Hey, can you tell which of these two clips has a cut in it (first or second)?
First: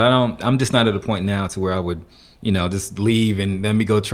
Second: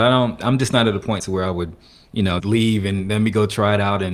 second